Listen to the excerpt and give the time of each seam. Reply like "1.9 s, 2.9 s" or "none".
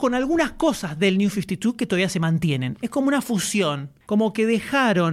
4.0 s